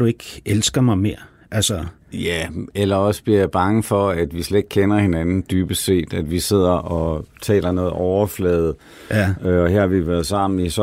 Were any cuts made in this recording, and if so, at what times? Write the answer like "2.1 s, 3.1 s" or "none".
2.0 s